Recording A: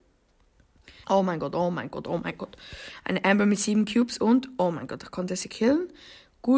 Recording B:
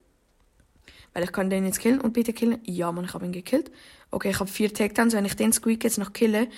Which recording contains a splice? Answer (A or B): A